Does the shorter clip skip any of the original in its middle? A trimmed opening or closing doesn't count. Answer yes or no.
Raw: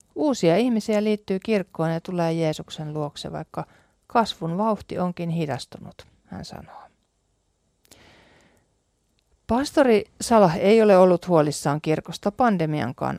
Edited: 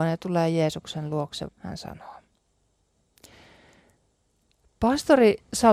yes